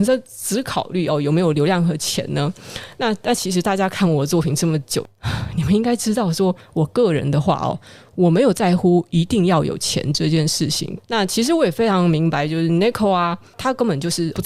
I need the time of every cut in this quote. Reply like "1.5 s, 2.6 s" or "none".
11.0 s